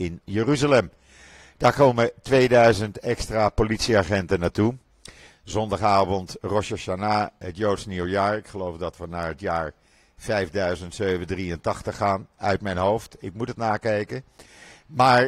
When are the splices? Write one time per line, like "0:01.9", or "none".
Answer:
0:05.3